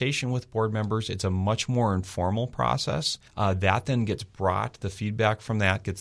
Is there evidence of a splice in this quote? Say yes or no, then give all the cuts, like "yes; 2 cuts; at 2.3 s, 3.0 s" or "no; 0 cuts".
yes; 1 cut; at 3.3 s